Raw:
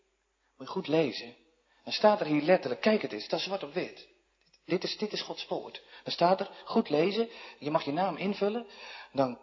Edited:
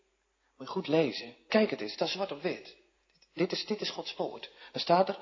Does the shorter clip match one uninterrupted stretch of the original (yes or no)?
no